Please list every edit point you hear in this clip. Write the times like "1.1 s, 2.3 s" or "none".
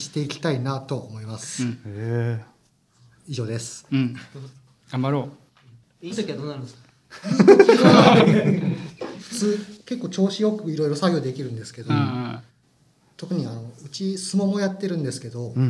6.1 s